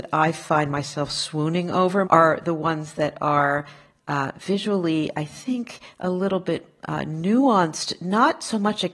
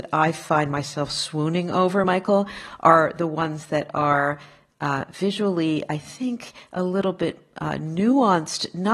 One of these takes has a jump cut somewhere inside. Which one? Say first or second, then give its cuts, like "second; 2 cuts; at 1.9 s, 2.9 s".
first; 1 cut; at 2.0 s